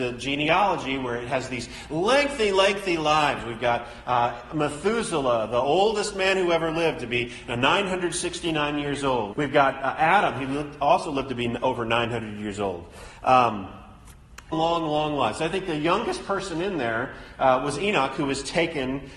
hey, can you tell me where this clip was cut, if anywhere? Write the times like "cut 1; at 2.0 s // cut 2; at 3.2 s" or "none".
cut 1; at 9.3 s // cut 2; at 14.5 s